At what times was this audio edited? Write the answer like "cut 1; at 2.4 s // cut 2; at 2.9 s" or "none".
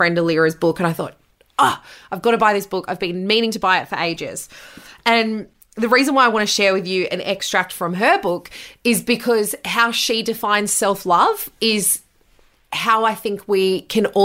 none